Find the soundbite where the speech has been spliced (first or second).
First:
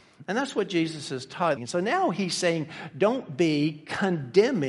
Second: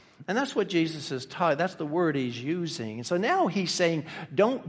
first